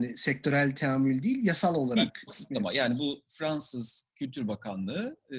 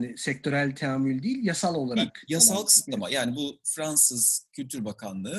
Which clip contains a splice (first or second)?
first